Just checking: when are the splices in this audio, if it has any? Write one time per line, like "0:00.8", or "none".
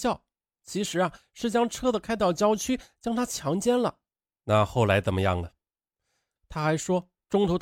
0:04.3
0:06.4